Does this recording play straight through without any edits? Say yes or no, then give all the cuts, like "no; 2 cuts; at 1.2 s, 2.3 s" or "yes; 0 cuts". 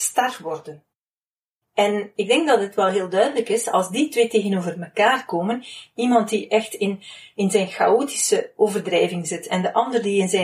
yes; 0 cuts